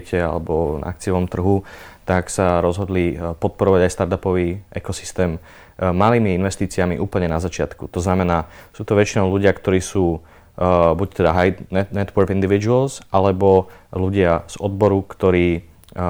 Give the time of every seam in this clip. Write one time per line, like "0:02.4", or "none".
none

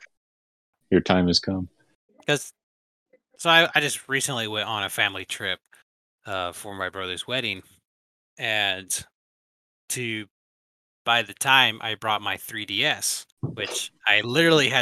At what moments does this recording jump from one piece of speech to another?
0:02.1
0:13.3

